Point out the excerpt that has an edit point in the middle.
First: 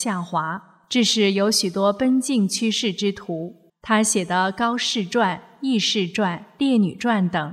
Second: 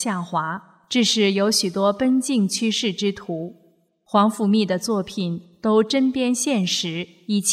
first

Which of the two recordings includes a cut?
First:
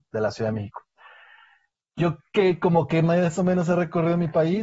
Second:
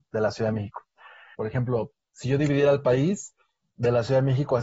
second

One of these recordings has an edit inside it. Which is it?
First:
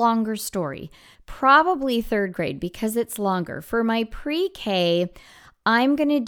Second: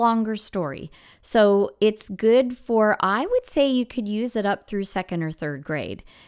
first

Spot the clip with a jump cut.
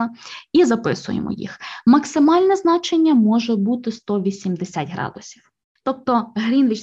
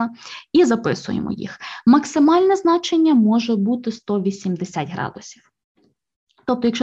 first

